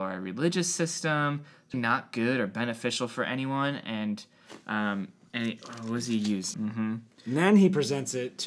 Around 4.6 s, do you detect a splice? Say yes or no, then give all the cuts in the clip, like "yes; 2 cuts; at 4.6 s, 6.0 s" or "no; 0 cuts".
no; 2 cuts; at 1.7 s, 6.5 s